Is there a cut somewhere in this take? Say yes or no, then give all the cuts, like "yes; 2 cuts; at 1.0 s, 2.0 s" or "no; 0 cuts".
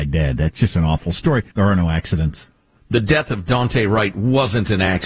yes; 1 cut; at 1.5 s